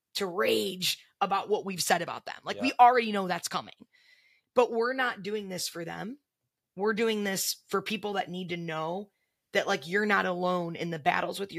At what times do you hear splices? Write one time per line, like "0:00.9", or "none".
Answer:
none